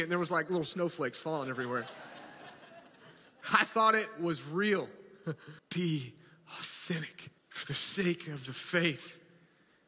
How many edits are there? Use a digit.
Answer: 2